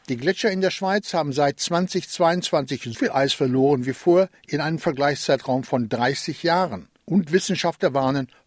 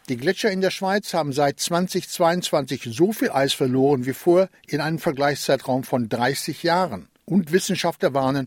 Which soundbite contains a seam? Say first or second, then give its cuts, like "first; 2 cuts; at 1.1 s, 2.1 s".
first; 1 cut; at 2.9 s